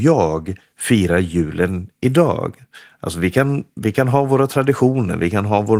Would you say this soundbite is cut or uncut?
uncut